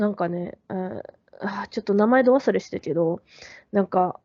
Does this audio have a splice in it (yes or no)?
no